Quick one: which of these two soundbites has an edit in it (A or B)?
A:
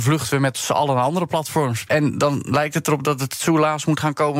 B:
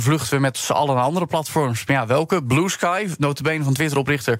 A